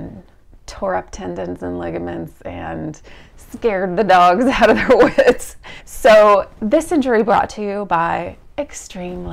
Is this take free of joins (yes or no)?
no